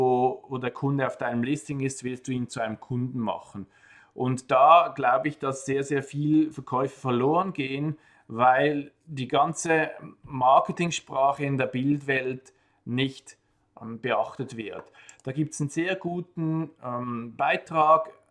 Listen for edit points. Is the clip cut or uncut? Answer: uncut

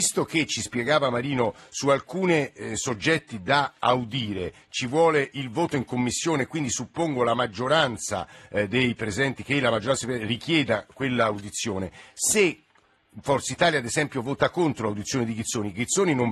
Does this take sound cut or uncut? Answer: uncut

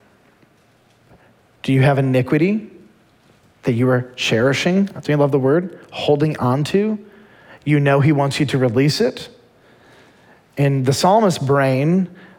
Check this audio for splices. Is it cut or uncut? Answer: uncut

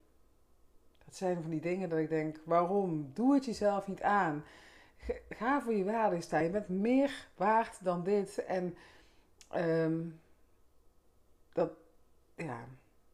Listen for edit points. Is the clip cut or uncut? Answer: uncut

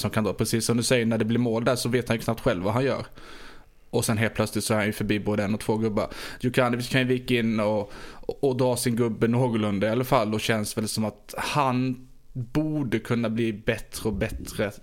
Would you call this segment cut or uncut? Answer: uncut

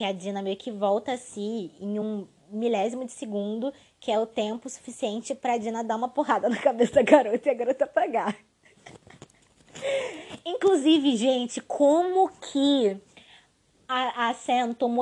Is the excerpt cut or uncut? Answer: uncut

